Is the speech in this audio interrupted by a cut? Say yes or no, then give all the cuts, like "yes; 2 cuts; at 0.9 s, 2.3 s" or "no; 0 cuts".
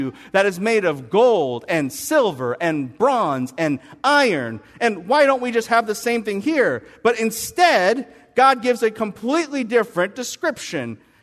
no; 0 cuts